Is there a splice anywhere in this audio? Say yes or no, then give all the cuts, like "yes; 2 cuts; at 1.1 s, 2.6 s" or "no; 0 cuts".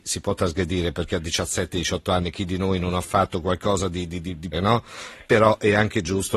yes; 1 cut; at 4.5 s